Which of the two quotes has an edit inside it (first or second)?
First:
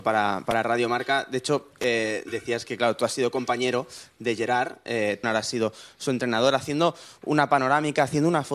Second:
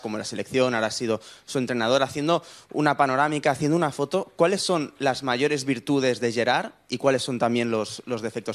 first